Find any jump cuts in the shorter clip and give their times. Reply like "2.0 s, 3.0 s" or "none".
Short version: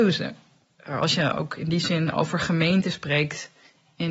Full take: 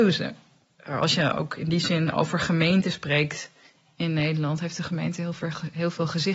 none